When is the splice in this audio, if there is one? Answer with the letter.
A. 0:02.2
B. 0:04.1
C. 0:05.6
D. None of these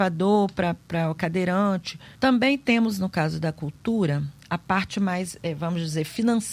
A